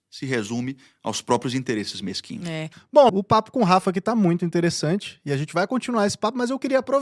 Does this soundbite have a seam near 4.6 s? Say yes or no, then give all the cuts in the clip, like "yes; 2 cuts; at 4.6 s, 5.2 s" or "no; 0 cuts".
no; 1 cut; at 3.1 s